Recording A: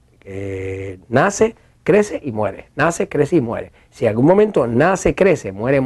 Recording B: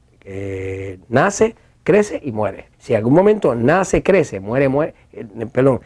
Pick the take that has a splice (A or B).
B